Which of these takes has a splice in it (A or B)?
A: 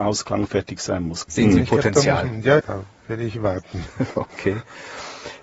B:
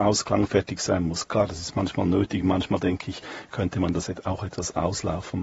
A